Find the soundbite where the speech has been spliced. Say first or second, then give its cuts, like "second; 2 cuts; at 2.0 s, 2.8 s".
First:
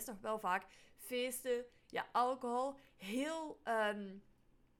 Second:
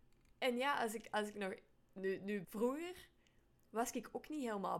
second; 1 cut; at 2.4 s